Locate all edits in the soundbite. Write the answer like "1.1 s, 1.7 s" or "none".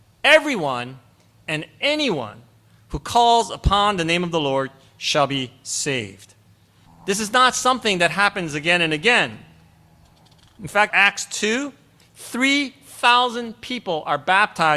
6.9 s, 10.9 s